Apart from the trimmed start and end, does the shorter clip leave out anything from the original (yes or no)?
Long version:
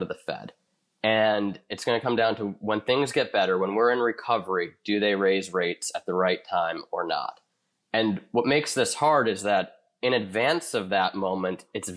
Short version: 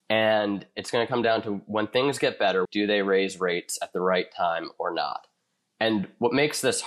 yes